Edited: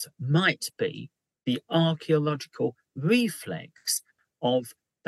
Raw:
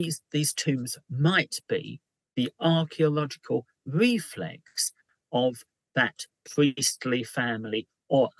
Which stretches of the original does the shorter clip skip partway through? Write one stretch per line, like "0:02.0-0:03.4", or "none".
none

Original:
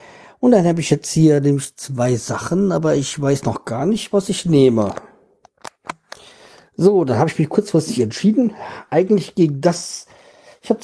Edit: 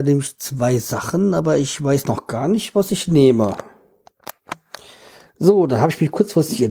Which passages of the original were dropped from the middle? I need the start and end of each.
none

